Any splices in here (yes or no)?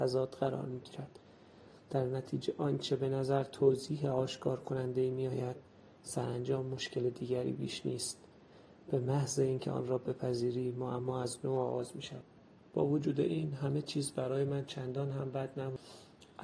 no